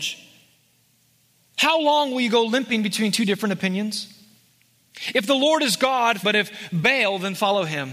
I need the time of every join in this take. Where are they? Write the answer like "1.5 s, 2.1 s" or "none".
6.2 s

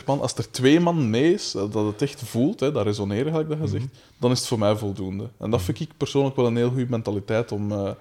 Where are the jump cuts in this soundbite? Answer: none

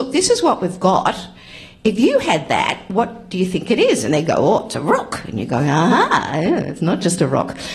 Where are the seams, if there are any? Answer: none

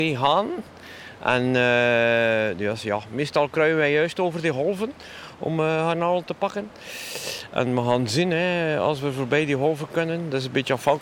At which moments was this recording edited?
none

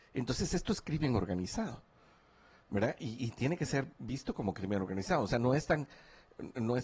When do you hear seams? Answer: none

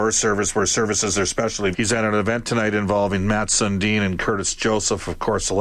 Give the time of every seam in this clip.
1.7 s

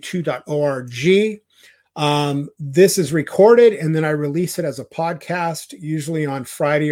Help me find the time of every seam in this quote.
none

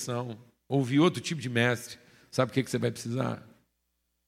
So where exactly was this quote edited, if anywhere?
none

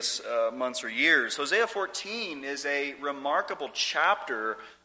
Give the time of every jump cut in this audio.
none

